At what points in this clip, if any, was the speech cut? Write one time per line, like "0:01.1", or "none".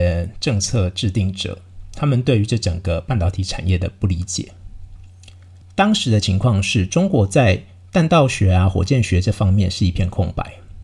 0:05.6

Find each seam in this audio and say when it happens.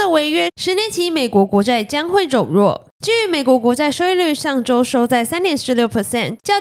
none

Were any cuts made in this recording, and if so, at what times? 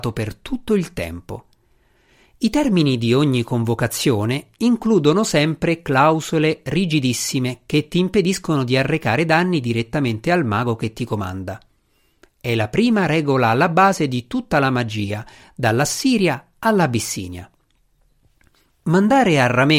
none

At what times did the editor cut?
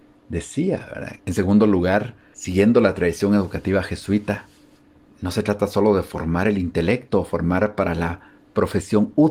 0:01.2

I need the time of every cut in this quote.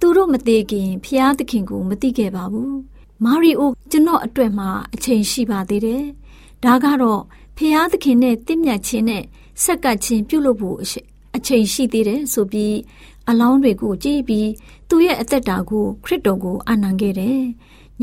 0:03.7

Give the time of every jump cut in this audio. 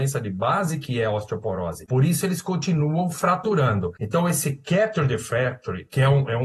none

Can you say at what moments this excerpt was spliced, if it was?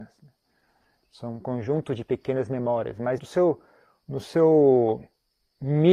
0:03.2

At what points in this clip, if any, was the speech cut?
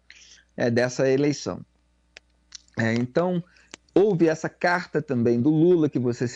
none

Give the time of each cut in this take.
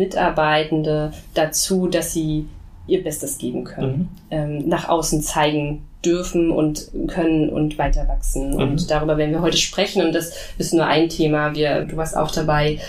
0:04.6
0:11.8

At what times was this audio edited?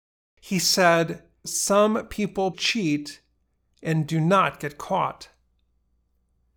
0:01.4
0:02.5

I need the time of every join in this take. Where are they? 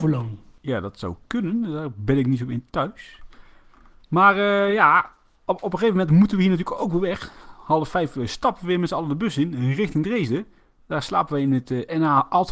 none

